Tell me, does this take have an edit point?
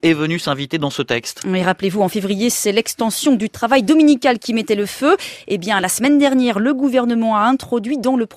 no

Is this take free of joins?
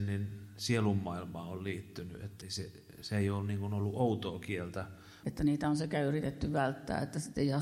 no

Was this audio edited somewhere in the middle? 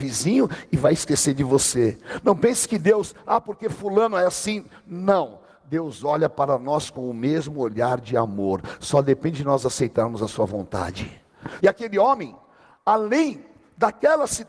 yes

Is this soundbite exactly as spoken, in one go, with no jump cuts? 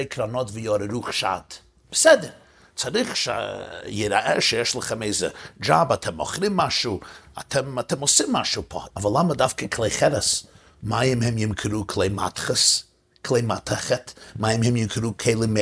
no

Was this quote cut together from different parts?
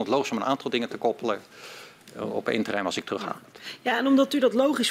no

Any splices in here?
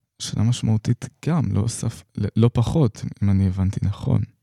no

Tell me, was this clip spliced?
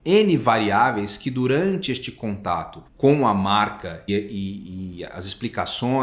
yes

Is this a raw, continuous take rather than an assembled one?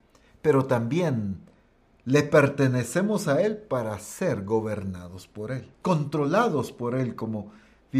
no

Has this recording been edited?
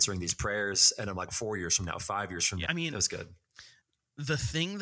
yes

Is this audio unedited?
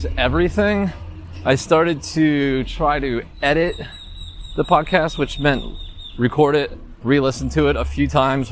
no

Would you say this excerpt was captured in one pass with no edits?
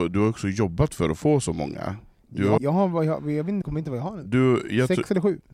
no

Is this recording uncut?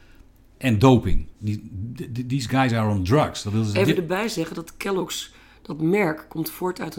no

